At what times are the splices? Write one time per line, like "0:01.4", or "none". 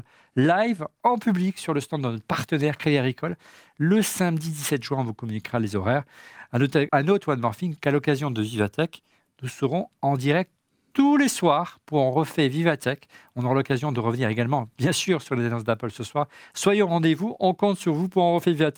0:06.9
0:16.5